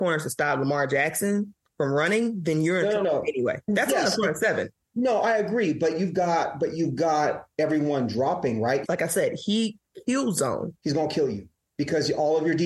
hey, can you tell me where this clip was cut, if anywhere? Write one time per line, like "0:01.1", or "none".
0:08.8
0:10.8